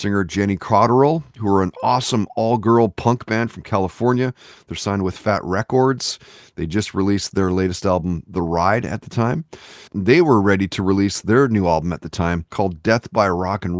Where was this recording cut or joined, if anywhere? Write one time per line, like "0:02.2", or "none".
0:09.9
0:12.5